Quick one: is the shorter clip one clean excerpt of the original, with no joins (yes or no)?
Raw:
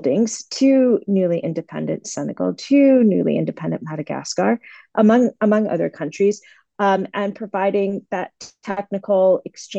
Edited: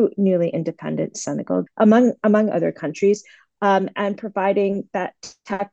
no